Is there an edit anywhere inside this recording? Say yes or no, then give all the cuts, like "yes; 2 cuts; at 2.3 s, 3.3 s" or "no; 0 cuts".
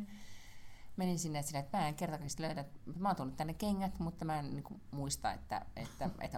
no; 0 cuts